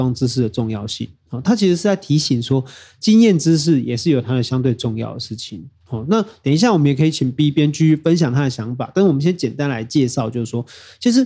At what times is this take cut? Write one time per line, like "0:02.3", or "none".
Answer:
none